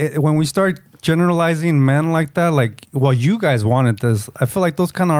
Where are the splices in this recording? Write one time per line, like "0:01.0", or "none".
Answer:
none